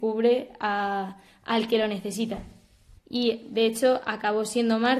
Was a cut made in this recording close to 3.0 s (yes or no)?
yes